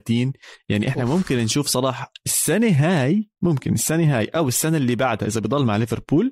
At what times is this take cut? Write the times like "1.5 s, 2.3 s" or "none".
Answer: 3.4 s